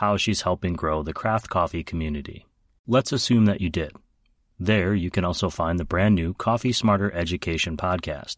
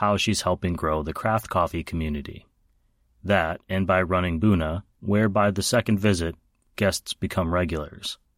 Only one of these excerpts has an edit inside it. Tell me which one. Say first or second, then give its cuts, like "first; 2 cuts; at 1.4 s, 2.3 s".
first; 1 cut; at 2.8 s